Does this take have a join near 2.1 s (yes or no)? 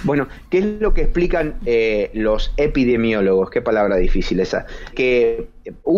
no